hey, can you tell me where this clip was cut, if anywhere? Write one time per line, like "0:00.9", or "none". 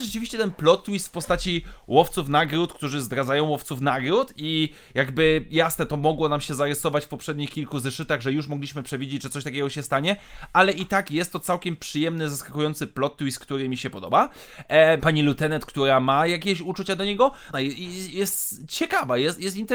0:15.0
0:17.5